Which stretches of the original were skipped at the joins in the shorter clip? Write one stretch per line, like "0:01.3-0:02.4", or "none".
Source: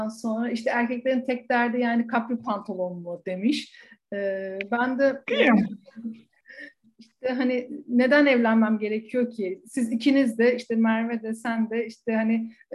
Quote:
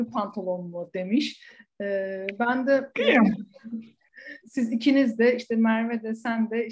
0:06.7-0:09.6

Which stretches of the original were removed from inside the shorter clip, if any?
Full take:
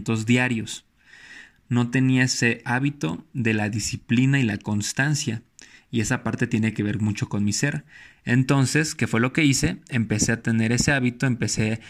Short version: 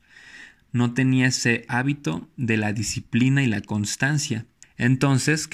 0:05.6-0:08.1

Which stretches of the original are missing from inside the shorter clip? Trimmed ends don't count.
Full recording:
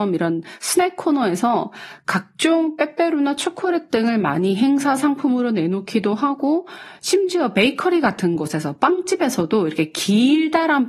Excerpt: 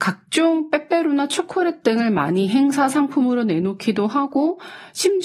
none

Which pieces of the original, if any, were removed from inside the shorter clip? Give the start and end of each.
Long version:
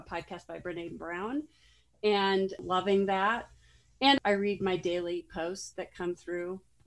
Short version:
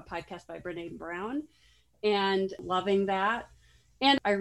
none

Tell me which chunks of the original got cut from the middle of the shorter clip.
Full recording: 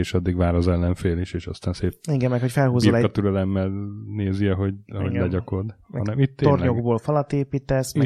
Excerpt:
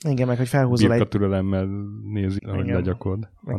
0:04.4-0:04.8

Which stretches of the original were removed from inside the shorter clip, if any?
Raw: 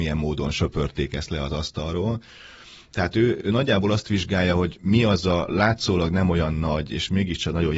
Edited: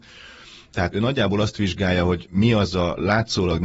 0:03.1-0:03.4

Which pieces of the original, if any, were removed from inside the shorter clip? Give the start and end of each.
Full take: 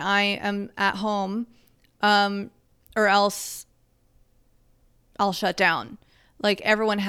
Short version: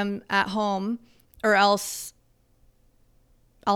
0:01.7-0:02.8

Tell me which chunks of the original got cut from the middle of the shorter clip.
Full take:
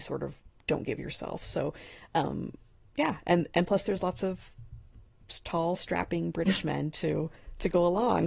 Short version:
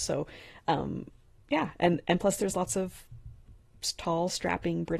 none

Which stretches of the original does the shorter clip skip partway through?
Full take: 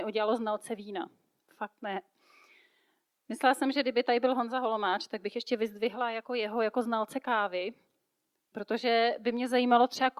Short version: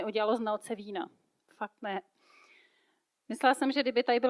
none

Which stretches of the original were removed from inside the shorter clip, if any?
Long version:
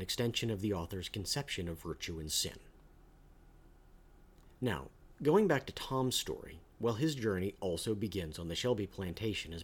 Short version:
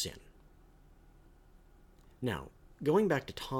none

